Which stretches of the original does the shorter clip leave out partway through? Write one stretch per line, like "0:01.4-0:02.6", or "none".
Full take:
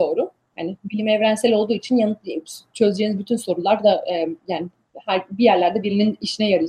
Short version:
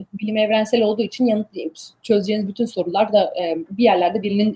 0:04.4-0:05.3